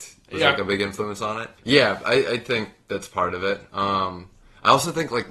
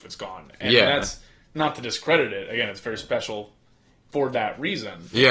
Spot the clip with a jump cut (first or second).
first